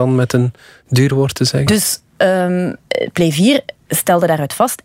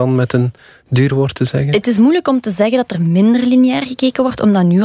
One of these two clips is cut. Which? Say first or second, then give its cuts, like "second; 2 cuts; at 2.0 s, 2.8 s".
first; 1 cut; at 1.7 s